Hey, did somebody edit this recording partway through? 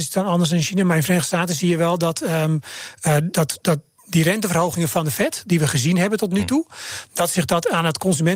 no; 0 cuts

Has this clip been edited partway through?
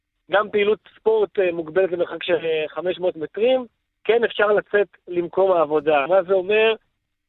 yes; 1 cut; at 6.1 s

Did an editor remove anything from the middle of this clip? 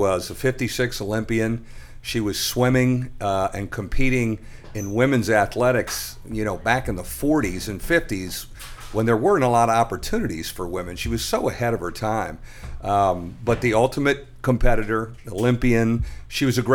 no; 0 cuts

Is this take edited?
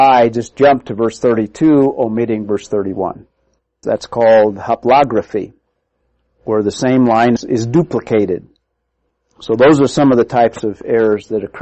yes; 2 cuts; at 3.8 s, 7.4 s

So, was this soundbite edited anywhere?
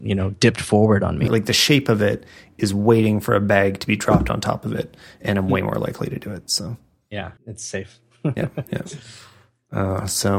yes; 2 cuts; at 1.3 s, 7.4 s

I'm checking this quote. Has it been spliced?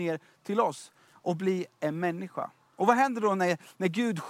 no; 0 cuts

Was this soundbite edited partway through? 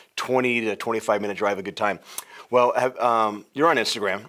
no; 0 cuts

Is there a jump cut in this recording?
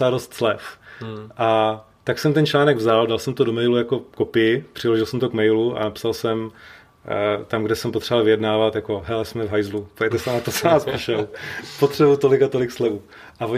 no; 0 cuts

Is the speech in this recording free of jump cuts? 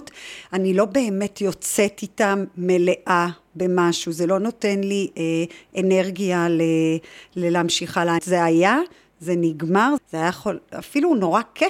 no; 2 cuts; at 8.2 s, 10.0 s

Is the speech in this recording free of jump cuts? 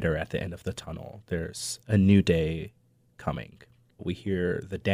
no; 1 cut; at 4.0 s

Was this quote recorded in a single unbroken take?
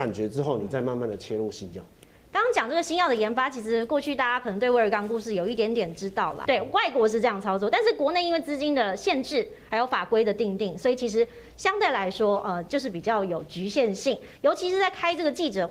no; 2 cuts; at 6.5 s, 14.4 s

